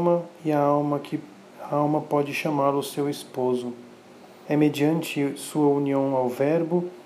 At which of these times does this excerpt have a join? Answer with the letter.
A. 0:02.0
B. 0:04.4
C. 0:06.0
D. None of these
B